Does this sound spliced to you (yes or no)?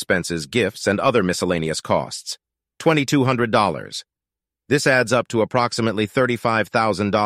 no